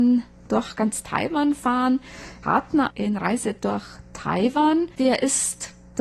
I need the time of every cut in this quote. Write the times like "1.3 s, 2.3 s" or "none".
2.4 s, 5.0 s